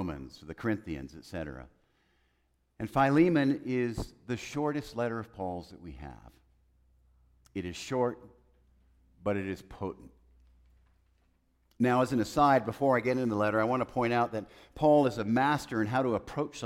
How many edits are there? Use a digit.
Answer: 0